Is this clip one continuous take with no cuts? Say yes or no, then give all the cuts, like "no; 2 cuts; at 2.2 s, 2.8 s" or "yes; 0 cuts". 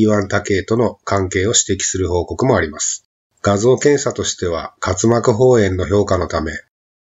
no; 1 cut; at 3.3 s